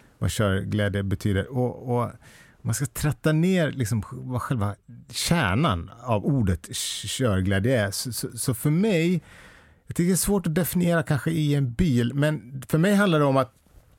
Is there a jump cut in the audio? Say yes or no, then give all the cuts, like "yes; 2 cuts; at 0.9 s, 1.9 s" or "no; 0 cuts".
no; 0 cuts